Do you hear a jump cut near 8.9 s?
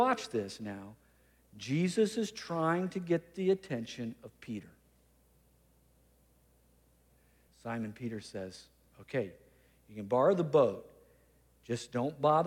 no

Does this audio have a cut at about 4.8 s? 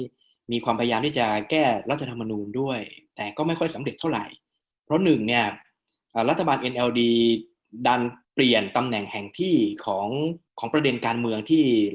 no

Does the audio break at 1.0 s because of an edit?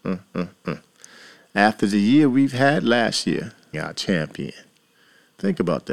no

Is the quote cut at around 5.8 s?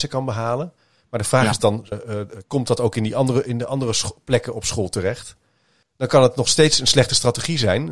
yes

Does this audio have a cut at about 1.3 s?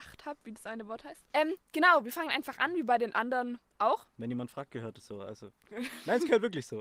yes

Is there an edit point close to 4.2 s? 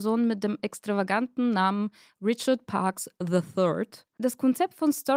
yes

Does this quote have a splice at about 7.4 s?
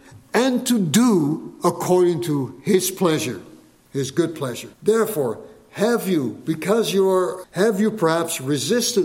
yes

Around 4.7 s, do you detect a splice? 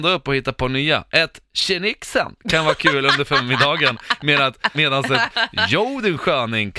yes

